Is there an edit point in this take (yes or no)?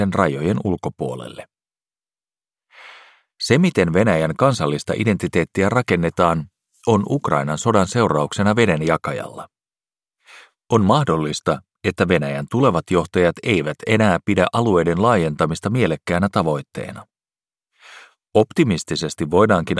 no